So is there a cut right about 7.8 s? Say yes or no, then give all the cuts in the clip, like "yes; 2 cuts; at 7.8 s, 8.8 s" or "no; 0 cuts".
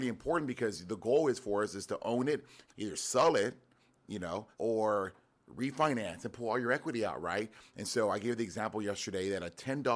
no; 2 cuts; at 2.7 s, 4.5 s